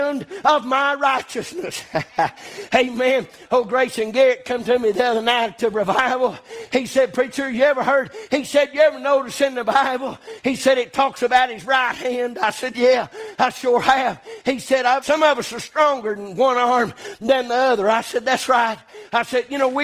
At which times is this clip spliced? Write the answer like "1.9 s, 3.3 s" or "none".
15.0 s